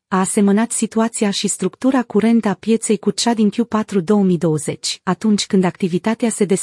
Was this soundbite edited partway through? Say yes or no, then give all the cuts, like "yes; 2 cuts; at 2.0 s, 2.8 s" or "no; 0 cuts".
no; 0 cuts